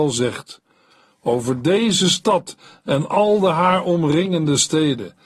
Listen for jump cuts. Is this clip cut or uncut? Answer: uncut